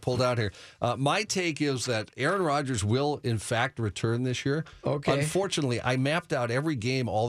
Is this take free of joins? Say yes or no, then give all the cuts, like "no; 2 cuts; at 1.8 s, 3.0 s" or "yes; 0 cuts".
yes; 0 cuts